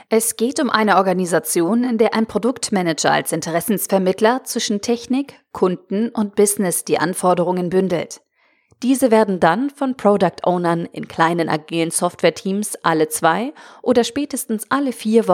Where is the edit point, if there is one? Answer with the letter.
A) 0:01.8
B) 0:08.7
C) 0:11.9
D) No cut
D